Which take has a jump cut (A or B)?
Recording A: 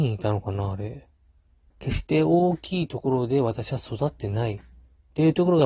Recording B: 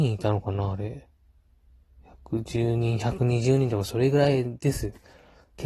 A